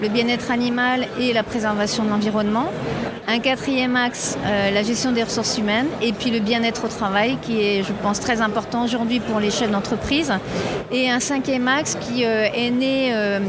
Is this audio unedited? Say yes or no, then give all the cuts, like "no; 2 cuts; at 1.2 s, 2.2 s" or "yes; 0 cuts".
yes; 0 cuts